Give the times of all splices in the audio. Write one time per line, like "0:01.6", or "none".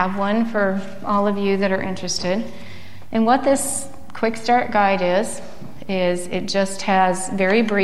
none